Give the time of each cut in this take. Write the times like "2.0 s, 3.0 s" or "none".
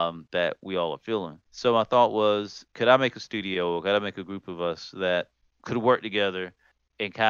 1.5 s, 2.7 s